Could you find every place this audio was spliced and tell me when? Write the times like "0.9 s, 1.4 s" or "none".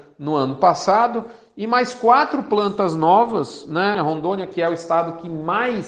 3.9 s